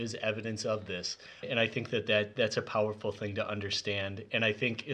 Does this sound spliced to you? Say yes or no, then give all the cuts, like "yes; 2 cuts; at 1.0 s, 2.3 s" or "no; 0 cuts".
yes; 1 cut; at 1.4 s